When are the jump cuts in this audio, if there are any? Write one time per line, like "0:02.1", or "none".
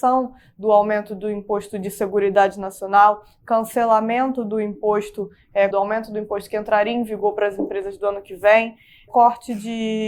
0:05.7
0:09.1